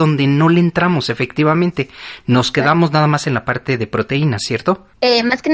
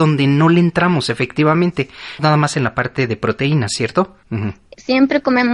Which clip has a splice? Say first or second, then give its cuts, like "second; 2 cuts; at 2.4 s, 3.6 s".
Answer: second; 2 cuts; at 2.2 s, 4.2 s